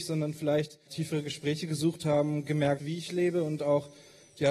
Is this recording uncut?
no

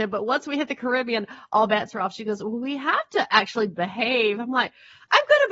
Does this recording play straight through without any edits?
yes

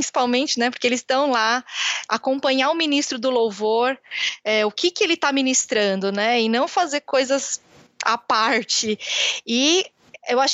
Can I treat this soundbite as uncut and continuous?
yes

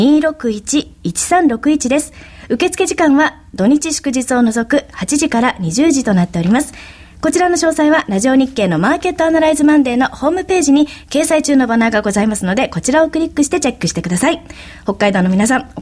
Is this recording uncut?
yes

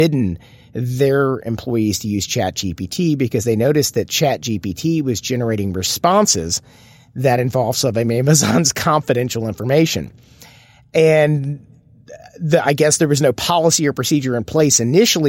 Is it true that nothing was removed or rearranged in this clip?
yes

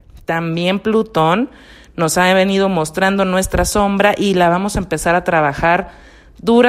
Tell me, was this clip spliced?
no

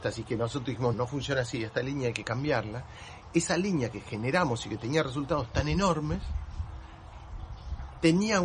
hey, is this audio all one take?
no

